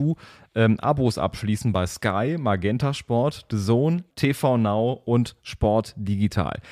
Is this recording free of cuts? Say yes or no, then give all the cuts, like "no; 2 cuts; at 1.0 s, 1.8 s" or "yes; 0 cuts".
no; 1 cut; at 4.1 s